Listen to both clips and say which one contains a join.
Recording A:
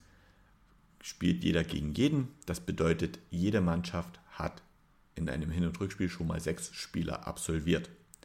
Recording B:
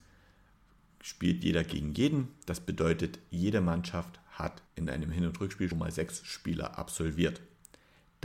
B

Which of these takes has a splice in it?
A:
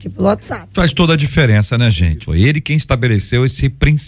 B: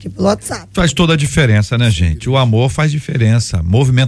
A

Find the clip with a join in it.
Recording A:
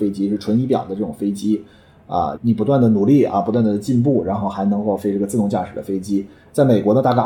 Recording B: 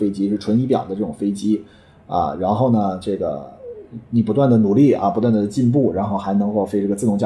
A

